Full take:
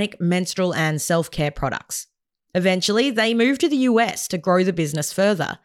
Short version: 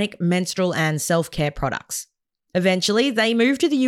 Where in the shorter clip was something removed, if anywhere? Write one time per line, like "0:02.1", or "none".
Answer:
none